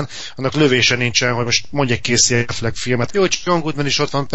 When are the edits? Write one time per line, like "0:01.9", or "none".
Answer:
0:03.1